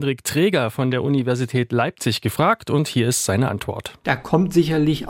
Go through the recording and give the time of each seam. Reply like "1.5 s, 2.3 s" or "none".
none